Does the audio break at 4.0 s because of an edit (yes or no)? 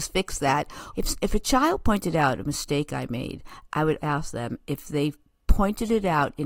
yes